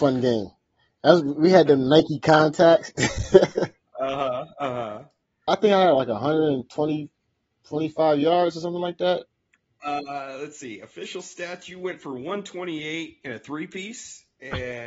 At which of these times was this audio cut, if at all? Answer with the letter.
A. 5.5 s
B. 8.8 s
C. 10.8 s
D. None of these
A